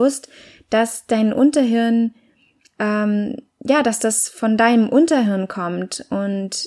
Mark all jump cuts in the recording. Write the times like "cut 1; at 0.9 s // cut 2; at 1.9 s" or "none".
none